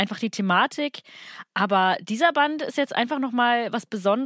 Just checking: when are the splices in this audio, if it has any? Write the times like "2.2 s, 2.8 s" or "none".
none